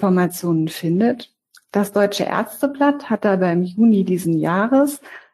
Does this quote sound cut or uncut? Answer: uncut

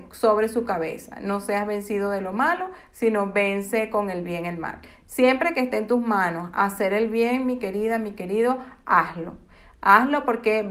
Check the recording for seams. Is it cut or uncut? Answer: uncut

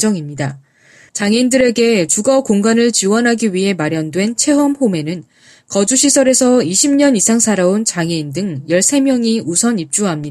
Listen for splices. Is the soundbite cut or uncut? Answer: cut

